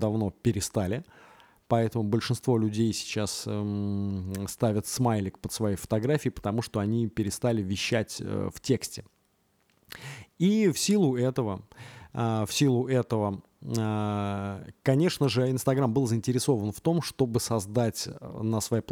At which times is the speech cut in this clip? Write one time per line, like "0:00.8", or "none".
none